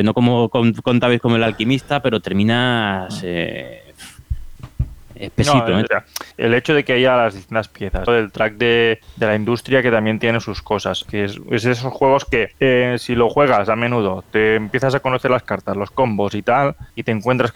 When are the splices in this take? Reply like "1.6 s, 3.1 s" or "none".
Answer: 5.9 s, 8.1 s, 11.0 s